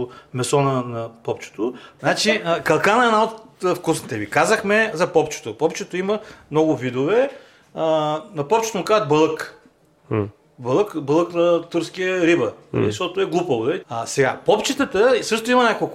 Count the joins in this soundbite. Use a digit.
2